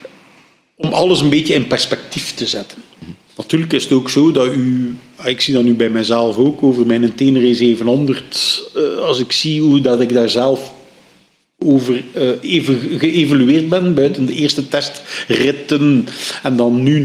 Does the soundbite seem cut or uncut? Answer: cut